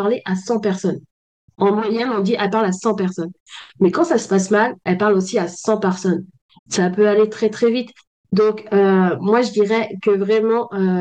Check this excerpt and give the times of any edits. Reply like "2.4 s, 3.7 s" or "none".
6.6 s